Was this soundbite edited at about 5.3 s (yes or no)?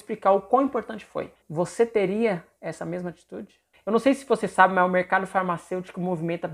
no